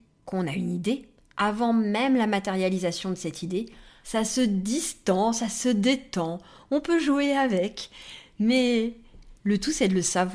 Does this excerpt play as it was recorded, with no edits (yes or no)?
no